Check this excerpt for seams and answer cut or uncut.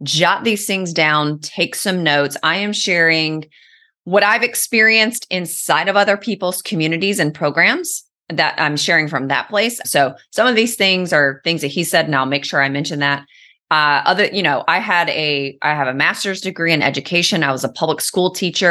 cut